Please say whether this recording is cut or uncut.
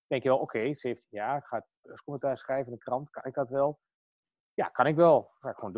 uncut